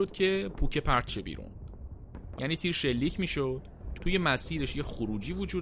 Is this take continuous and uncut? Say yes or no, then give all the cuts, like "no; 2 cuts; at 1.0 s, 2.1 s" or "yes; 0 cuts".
no; 2 cuts; at 2.4 s, 4.0 s